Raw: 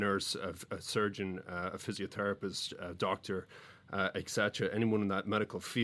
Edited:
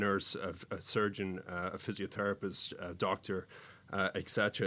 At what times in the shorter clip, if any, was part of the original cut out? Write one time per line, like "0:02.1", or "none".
none